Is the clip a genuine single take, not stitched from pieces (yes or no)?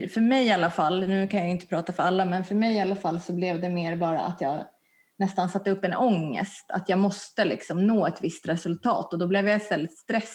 yes